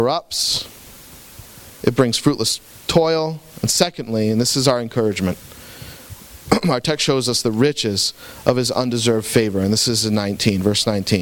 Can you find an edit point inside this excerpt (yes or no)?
no